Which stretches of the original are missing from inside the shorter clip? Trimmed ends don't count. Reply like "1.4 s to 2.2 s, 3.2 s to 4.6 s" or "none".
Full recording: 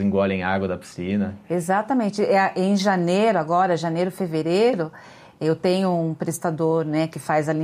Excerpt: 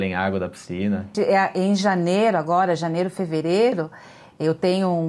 1.4 s to 2.2 s